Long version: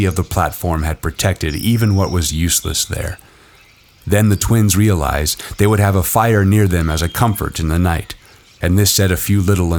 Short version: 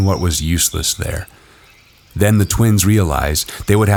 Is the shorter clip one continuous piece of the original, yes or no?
yes